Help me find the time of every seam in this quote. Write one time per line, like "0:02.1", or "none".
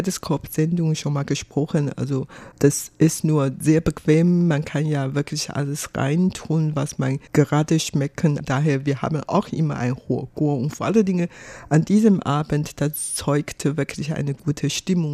none